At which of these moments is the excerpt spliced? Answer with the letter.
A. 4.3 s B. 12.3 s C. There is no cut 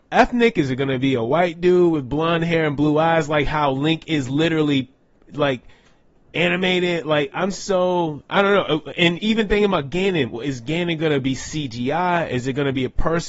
C